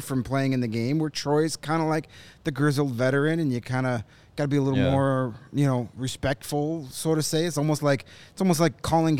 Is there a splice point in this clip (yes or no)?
no